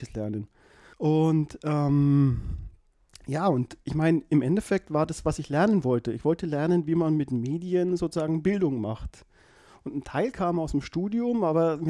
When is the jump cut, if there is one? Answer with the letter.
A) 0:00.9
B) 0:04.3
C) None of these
A